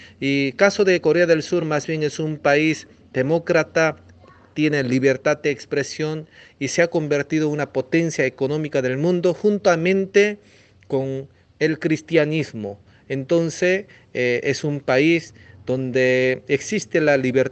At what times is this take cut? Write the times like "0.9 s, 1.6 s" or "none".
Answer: none